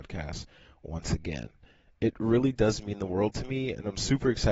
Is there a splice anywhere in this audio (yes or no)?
no